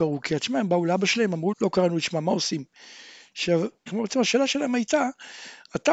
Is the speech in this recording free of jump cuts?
no; 2 cuts; at 1.5 s, 3.9 s

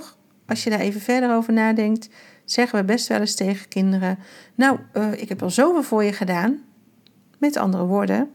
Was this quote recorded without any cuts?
yes; 0 cuts

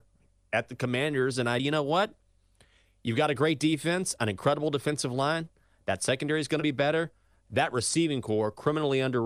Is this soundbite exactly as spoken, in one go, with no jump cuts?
no; 1 cut; at 1.6 s

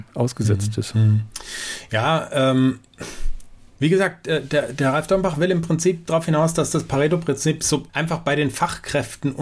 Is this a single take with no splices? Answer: no; 1 cut; at 7.9 s

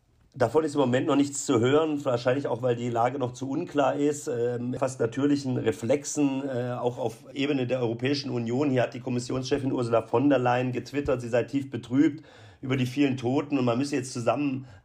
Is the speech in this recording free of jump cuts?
no; 1 cut; at 4.8 s

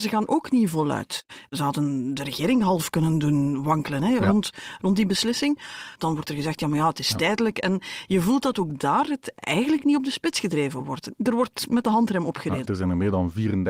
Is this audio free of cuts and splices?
no; 2 cuts; at 5.9 s, 12.6 s

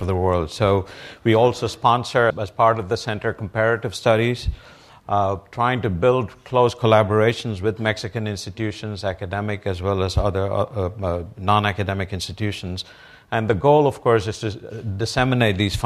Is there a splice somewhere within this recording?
yes; 1 cut; at 2.3 s

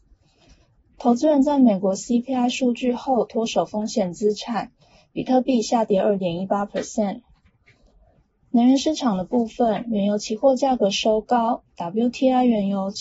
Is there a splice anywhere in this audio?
no; 0 cuts

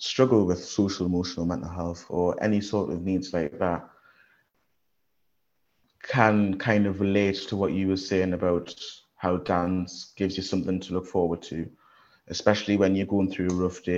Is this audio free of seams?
yes; 0 cuts

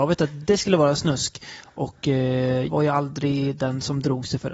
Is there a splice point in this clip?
yes; 1 cut; at 2.7 s

